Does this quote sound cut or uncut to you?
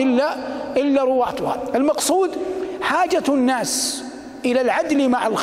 uncut